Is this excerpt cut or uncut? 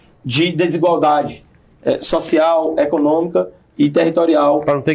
uncut